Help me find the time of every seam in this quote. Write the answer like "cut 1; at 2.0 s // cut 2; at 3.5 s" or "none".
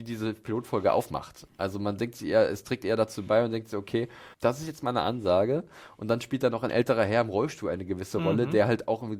cut 1; at 4.3 s